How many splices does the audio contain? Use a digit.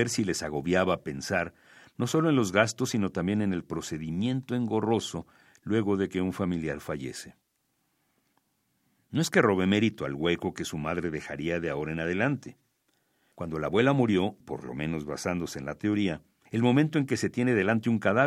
2